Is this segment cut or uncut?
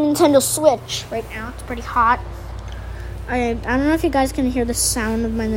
uncut